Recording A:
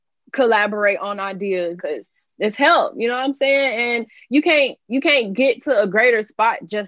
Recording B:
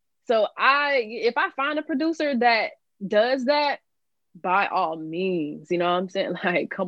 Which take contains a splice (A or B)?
A